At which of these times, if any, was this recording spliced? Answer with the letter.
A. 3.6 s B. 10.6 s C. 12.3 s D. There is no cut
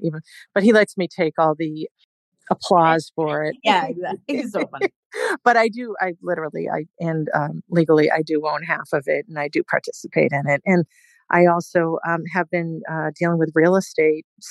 A